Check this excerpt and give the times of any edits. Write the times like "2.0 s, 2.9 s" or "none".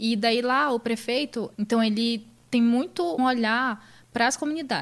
1.5 s, 3.2 s